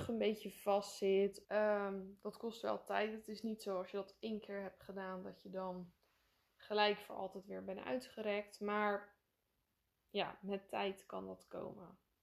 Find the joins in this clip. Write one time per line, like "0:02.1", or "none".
0:01.4